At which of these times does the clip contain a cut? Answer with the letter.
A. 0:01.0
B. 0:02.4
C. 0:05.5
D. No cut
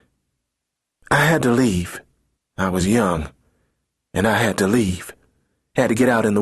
B